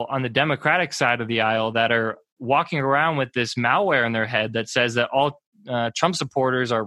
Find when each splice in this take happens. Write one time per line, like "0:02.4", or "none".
none